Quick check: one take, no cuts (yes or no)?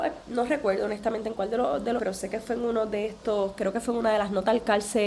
no